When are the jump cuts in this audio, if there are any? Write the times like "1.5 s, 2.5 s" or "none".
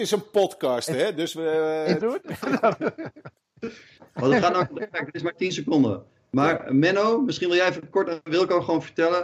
2.0 s